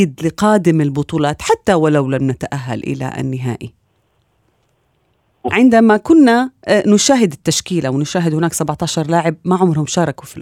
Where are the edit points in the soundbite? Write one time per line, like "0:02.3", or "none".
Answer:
0:05.5

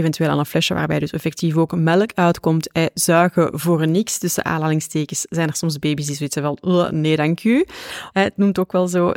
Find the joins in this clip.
0:08.1

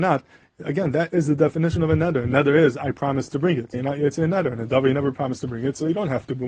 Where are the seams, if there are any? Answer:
0:03.7

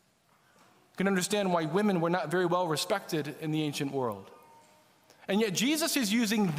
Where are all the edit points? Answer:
none

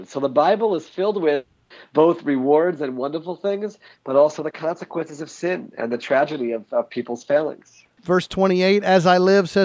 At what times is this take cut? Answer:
0:08.0

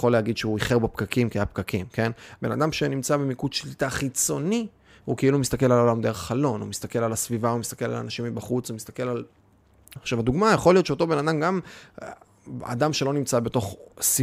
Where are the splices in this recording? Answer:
0:02.4
0:10.0

